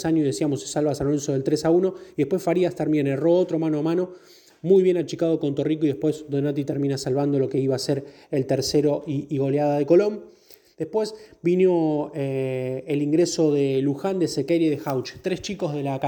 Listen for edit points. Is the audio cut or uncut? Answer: uncut